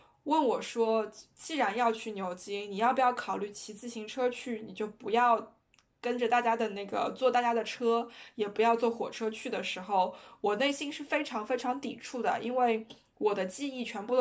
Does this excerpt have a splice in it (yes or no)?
no